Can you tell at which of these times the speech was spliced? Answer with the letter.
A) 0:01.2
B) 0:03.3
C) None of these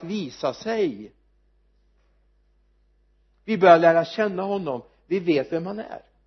C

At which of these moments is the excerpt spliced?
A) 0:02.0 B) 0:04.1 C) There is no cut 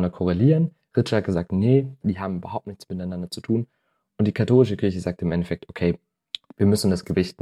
A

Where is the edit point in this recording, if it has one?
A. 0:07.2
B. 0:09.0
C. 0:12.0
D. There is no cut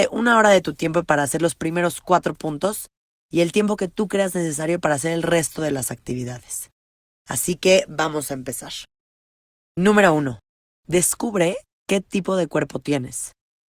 D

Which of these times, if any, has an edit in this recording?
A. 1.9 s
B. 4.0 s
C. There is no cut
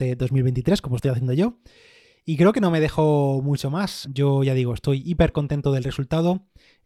B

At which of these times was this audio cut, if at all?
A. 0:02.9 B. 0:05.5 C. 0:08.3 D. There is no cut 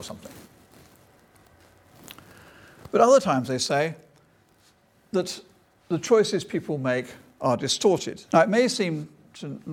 C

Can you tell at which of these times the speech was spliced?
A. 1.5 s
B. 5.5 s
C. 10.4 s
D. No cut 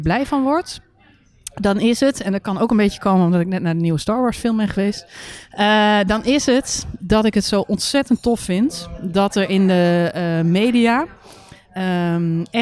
D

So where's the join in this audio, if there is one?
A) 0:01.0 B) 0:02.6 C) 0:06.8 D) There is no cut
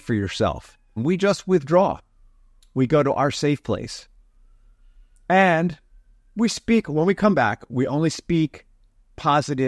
A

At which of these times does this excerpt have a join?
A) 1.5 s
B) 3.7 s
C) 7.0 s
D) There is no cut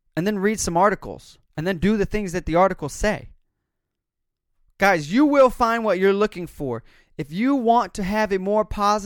A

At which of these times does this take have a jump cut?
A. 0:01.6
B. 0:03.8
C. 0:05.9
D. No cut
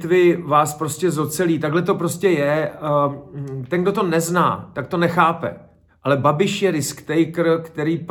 C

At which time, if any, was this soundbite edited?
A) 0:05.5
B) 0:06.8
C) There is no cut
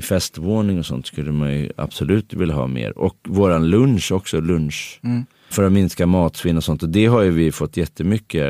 A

